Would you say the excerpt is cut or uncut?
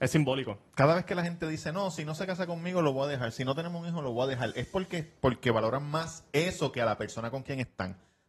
uncut